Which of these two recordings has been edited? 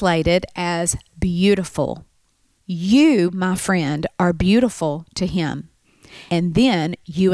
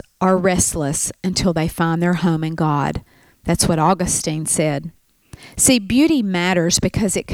first; 2 cuts; at 2.6 s, 6.3 s

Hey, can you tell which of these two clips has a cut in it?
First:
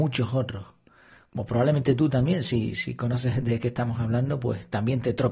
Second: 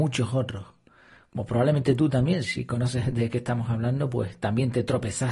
second; 1 cut; at 2.4 s

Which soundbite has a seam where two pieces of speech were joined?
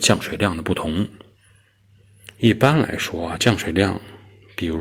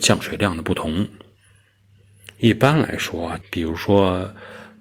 second; 1 cut; at 3.4 s

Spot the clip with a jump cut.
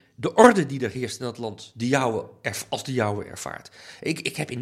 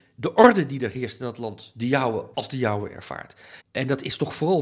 second; 2 cuts; at 2.3 s, 3.6 s

